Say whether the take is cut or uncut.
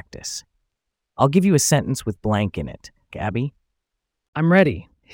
cut